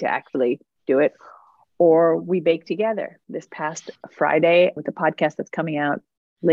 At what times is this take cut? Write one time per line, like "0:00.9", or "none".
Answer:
0:04.8